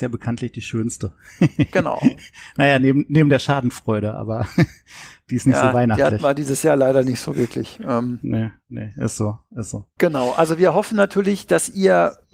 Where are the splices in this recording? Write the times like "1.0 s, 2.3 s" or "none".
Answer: none